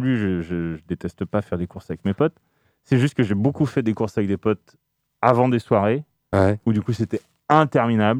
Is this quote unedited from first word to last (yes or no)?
yes